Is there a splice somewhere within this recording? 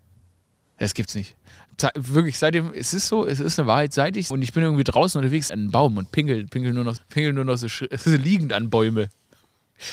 yes; 3 cuts; at 4.3 s, 5.5 s, 7.0 s

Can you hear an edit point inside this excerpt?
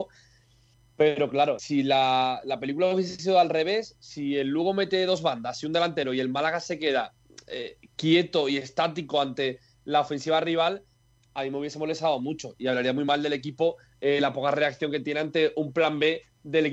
yes; 1 cut; at 1.6 s

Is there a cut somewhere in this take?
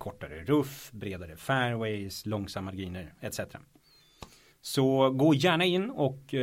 no; 0 cuts

